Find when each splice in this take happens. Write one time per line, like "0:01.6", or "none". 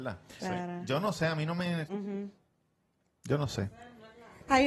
0:01.8